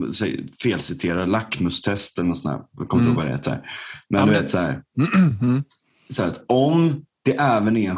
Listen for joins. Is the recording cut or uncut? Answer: uncut